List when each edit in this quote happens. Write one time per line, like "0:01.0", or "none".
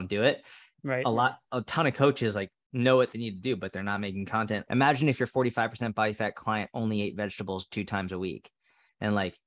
0:04.7